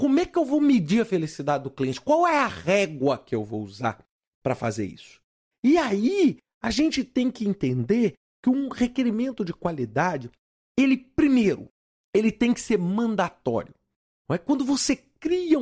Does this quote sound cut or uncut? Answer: cut